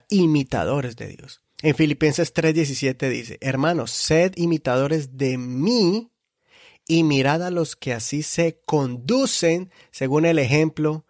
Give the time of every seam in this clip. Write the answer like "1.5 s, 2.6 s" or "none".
1.5 s